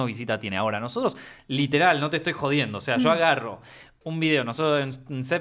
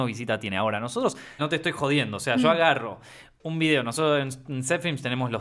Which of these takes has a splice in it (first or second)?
second